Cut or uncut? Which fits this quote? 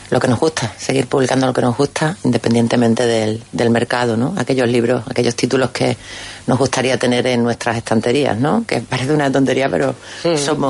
uncut